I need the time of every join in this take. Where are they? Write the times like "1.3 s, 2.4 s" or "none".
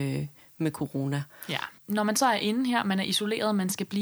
1.8 s